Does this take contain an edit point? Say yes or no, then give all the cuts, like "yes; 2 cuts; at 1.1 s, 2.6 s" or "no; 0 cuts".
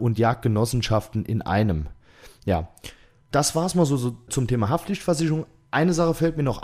yes; 1 cut; at 3.3 s